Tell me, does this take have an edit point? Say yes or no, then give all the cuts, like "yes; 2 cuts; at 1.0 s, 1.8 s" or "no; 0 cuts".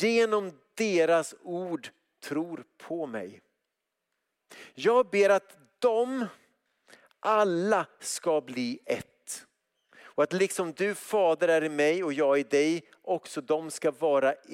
no; 0 cuts